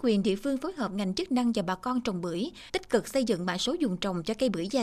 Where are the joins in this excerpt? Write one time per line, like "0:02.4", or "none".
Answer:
0:02.7